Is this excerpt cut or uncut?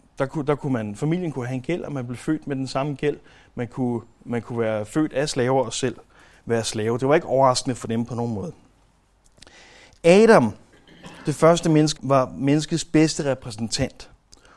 cut